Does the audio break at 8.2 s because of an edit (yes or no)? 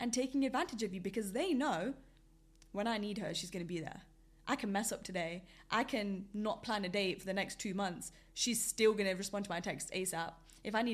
no